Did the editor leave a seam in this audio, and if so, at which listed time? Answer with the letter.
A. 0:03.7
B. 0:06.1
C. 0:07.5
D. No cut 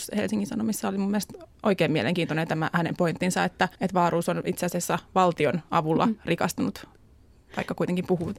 A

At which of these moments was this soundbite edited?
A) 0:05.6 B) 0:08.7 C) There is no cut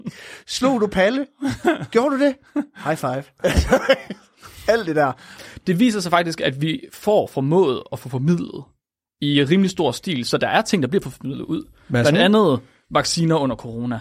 C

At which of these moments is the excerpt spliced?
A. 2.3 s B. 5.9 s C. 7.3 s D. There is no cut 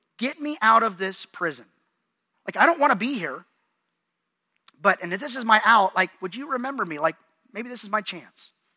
A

